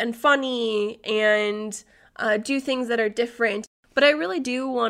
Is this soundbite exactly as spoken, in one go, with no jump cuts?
no; 1 cut; at 3.8 s

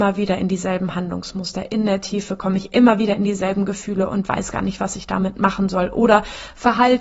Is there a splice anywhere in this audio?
no; 0 cuts

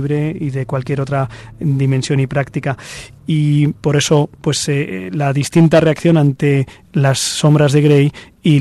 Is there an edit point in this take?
no; 0 cuts

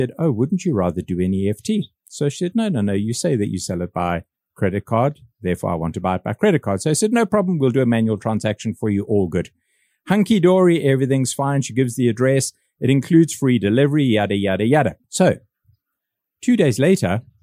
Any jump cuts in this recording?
yes; 1 cut; at 15.0 s

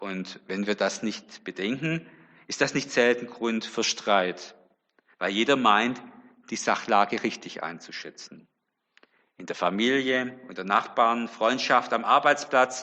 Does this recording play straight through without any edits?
yes; 0 cuts

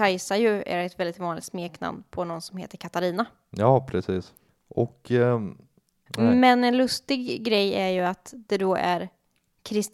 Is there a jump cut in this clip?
yes; 1 cut; at 6.1 s

